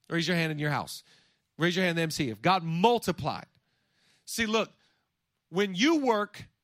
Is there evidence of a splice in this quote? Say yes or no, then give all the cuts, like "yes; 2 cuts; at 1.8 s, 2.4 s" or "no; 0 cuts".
no; 0 cuts